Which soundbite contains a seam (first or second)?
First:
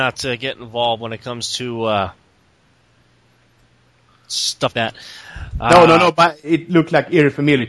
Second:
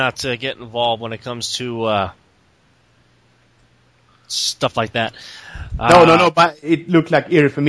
first